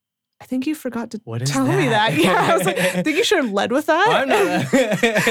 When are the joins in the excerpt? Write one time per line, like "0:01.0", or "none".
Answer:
none

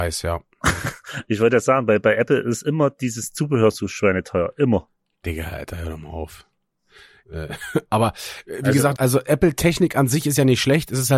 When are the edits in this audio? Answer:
0:07.2
0:09.0

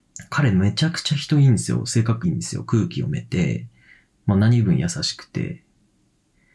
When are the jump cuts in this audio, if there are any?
0:02.2

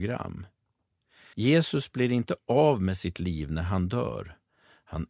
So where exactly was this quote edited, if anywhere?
0:01.3

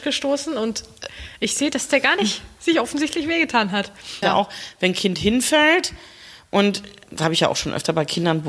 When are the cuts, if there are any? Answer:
0:04.2

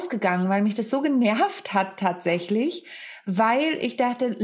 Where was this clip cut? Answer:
none

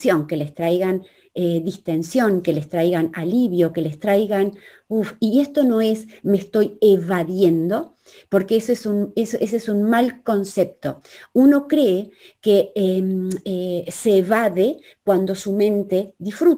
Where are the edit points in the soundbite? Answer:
none

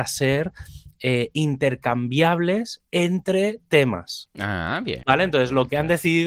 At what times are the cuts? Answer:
0:05.0

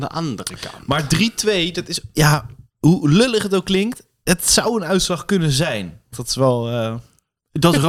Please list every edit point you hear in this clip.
0:06.1

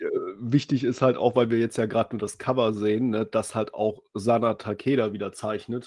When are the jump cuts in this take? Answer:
none

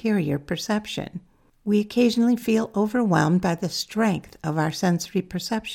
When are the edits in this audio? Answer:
none

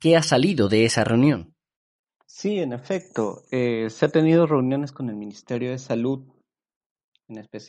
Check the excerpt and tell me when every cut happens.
none

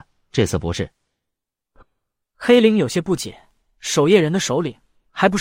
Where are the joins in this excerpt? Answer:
none

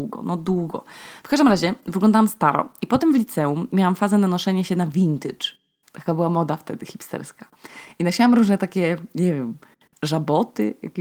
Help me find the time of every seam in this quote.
none

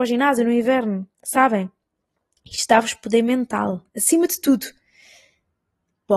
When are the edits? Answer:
0:01.1

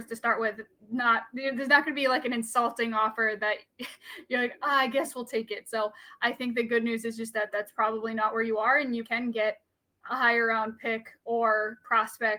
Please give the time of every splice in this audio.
0:09.0

